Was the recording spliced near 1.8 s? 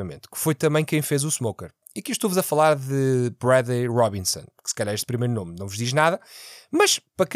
no; 0 cuts

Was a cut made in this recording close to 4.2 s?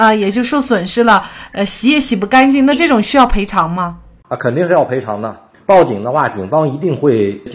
no; 1 cut; at 5.5 s

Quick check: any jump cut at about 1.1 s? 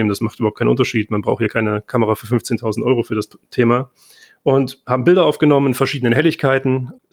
no; 0 cuts

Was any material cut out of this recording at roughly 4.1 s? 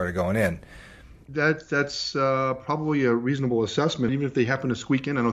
yes; 2 cuts; at 1.3 s, 4.1 s

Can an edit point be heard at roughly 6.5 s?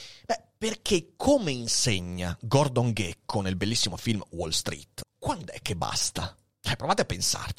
no; 1 cut; at 5.0 s

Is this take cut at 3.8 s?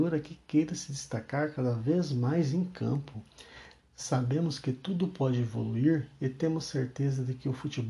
yes; 1 cut; at 3.8 s

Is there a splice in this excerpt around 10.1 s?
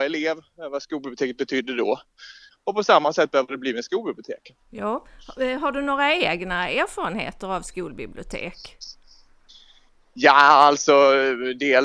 no; 1 cut; at 2.5 s

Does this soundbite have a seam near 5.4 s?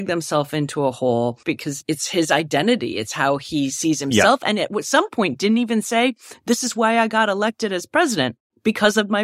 no; 1 cut; at 1.4 s

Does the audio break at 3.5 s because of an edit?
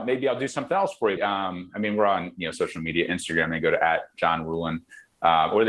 no; 1 cut; at 1.2 s

